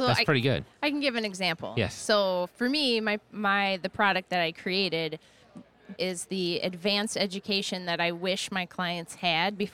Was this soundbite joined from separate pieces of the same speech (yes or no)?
yes